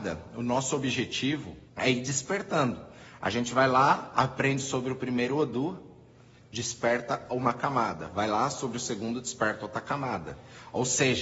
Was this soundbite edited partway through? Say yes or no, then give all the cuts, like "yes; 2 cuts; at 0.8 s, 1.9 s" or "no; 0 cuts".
yes; 1 cut; at 1.7 s